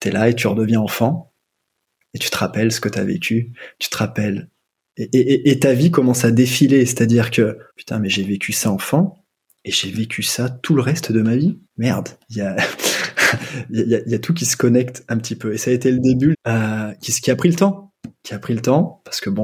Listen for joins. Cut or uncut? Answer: cut